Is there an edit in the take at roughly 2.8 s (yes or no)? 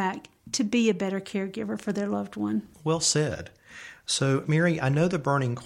no